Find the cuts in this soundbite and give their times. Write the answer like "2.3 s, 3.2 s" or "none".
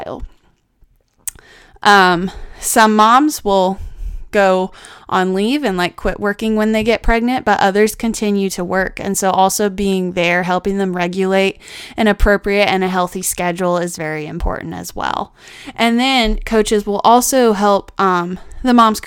14.0 s